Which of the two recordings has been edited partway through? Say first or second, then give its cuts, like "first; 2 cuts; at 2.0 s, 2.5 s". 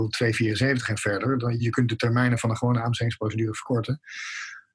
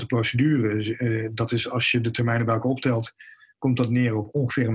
first; 1 cut; at 1.6 s